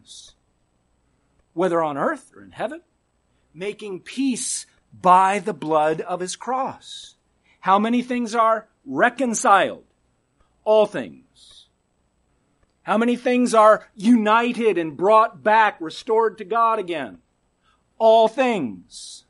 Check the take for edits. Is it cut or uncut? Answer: uncut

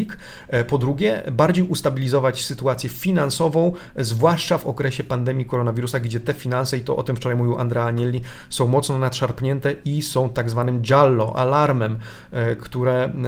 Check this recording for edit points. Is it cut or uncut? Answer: uncut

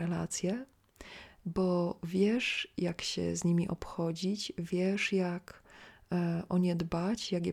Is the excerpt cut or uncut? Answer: uncut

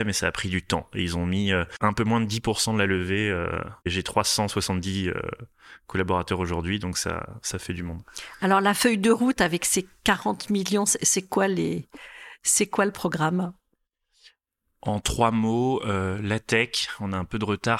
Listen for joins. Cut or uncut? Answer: uncut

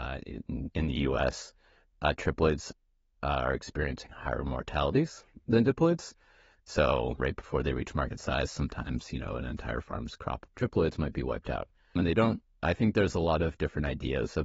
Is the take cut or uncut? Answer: cut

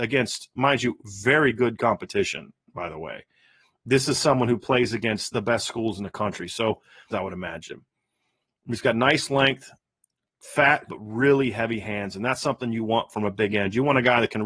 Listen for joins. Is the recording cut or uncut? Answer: cut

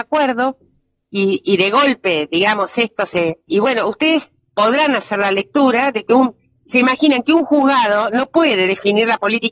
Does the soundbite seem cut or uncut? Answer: cut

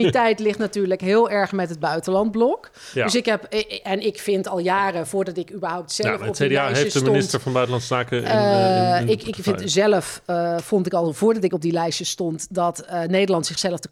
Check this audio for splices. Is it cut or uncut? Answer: uncut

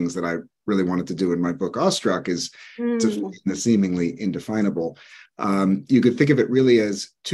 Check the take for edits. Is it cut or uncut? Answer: uncut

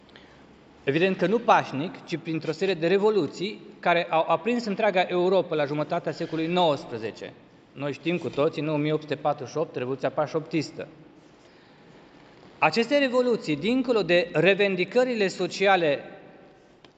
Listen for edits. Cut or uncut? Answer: uncut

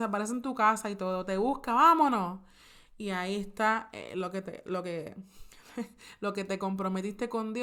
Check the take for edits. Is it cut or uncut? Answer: uncut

